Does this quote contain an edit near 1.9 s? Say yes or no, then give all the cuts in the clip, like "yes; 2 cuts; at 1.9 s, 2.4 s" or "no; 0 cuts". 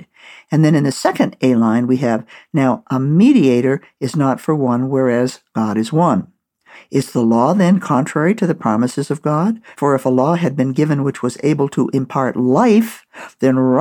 no; 2 cuts; at 6.7 s, 9.7 s